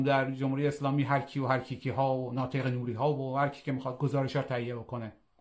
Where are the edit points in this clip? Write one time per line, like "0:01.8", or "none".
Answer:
none

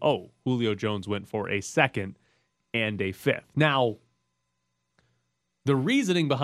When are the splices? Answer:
none

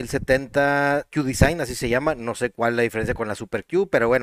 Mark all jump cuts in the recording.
0:01.1

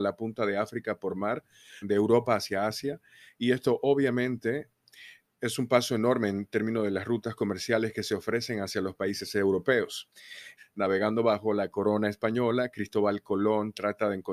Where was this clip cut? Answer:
0:01.8
0:05.3
0:10.6

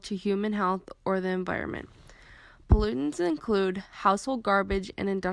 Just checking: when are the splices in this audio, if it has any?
none

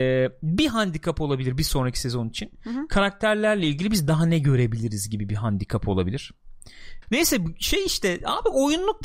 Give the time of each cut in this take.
0:07.0

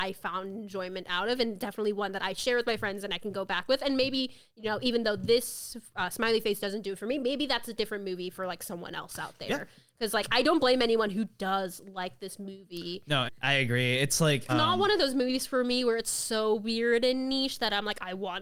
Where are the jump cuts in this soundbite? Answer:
0:13.3
0:14.5

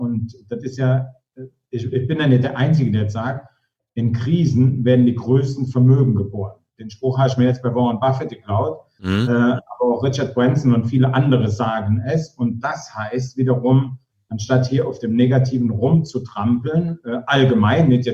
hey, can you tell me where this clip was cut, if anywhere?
none

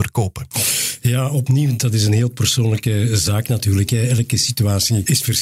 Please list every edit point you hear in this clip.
none

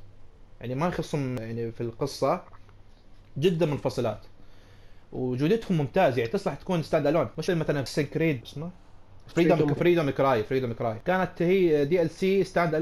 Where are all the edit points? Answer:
0:07.5
0:09.8

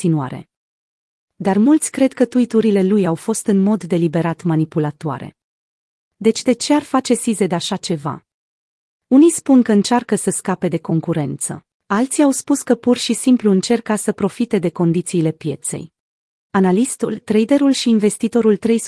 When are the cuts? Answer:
0:11.7
0:16.5

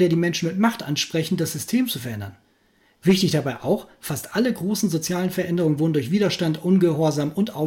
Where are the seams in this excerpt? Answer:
none

